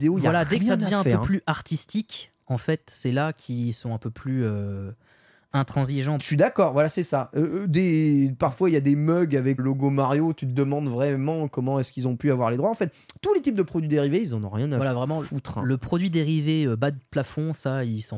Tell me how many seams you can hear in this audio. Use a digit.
2